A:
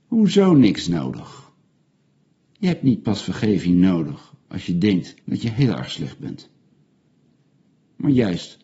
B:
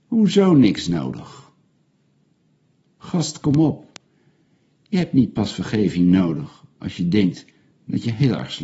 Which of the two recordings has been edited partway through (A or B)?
A